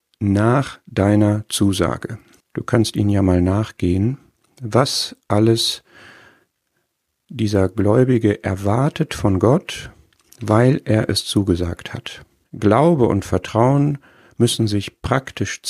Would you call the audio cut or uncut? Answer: cut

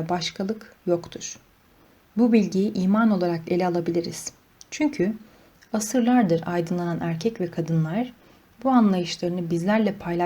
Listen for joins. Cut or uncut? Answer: uncut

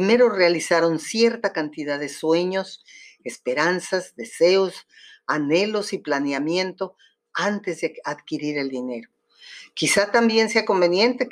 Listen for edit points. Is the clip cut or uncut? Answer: uncut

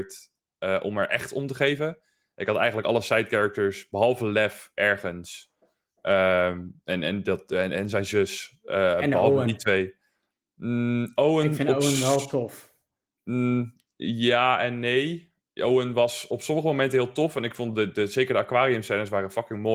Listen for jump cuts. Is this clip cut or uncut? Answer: uncut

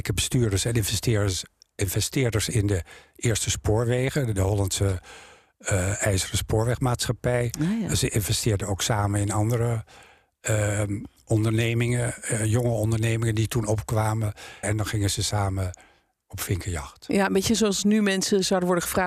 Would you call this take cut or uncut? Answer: cut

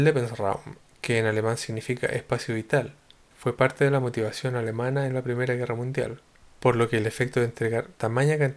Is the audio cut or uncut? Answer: uncut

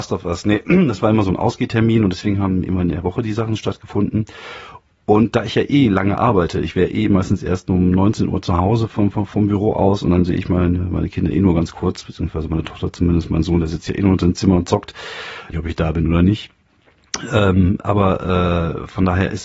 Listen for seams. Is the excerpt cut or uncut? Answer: cut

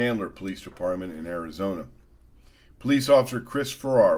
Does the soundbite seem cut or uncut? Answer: uncut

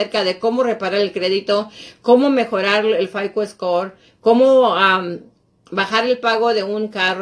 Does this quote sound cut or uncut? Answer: uncut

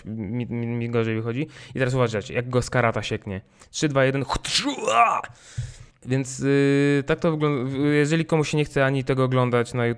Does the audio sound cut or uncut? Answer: cut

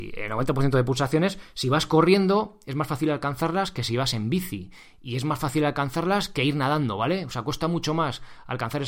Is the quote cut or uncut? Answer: uncut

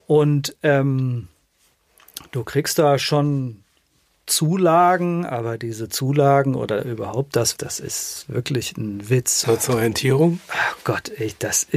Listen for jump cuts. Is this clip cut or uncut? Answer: cut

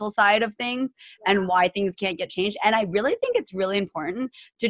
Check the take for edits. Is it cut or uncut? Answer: uncut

